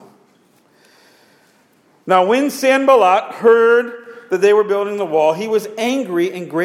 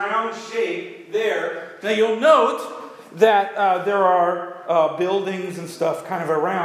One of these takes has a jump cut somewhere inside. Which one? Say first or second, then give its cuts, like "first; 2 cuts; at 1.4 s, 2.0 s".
second; 1 cut; at 1.8 s